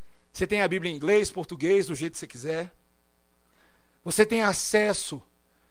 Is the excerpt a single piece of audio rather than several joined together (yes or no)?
yes